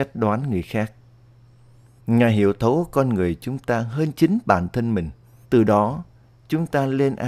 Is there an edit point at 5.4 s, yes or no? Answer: yes